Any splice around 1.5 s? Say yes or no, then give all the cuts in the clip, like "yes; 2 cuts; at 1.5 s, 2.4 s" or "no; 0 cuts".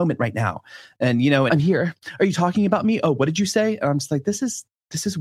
yes; 1 cut; at 1.5 s